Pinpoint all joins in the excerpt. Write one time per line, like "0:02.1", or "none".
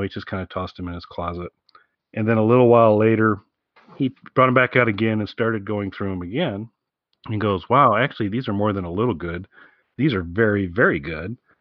none